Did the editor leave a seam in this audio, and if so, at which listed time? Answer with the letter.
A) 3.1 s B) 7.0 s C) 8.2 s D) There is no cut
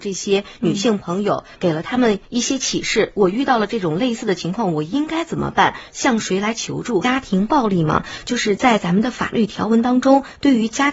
B